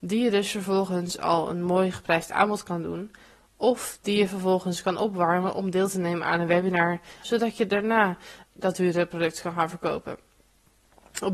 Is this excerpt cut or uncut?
cut